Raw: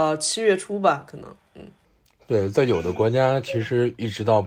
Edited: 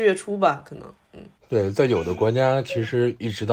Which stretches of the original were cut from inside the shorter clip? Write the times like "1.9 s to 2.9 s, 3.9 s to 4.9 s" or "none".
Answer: 1.8 s to 2.1 s